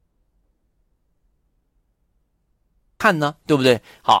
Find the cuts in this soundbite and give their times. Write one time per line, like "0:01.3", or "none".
none

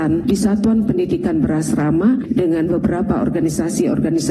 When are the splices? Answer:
0:02.2

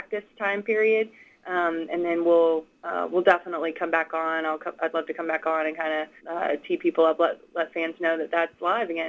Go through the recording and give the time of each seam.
0:06.2

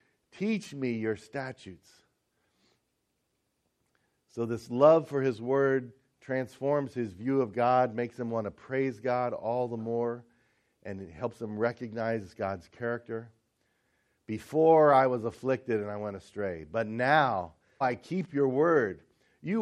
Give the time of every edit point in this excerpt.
0:17.8

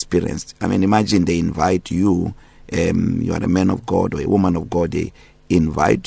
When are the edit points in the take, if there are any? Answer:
none

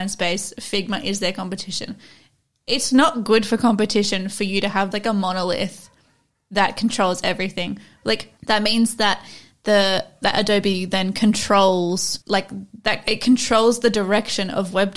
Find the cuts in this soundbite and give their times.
0:04.9
0:08.4
0:12.2

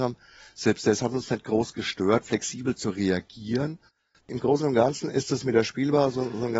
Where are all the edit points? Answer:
0:02.2
0:04.2

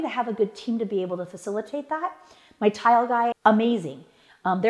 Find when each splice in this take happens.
0:03.3

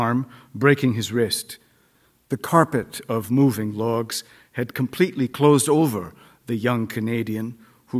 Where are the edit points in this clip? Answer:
none

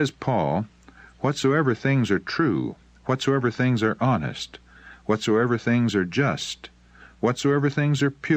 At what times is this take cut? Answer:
none

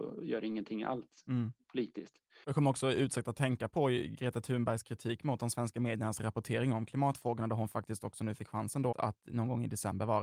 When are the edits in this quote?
0:02.4
0:08.9

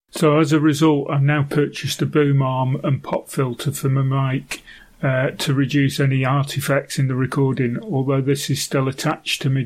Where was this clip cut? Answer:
none

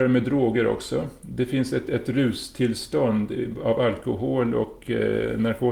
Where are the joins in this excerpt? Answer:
none

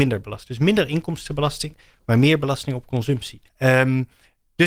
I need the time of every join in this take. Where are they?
0:03.5

